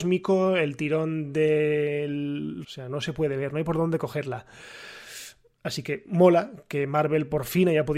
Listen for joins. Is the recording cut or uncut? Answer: cut